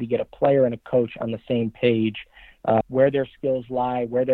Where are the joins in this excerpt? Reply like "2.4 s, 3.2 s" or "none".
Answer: 2.8 s